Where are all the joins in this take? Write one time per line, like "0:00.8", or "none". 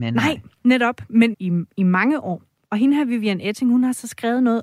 0:01.3